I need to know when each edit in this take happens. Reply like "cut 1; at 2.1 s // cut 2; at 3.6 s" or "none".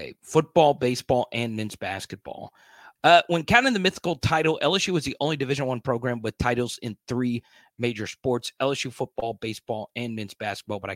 cut 1; at 3.0 s